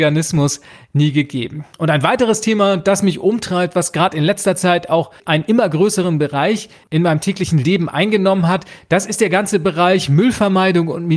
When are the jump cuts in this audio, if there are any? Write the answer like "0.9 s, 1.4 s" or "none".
none